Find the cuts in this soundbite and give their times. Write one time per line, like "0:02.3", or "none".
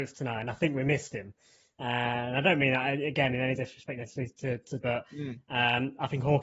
0:04.8